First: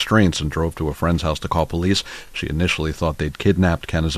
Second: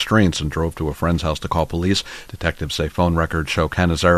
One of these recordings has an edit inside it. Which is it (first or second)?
second